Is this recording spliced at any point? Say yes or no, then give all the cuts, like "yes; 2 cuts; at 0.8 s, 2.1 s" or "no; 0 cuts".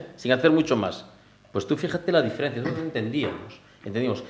no; 0 cuts